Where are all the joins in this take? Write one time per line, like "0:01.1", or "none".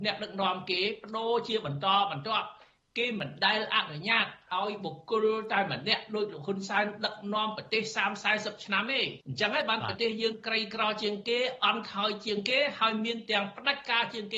0:09.2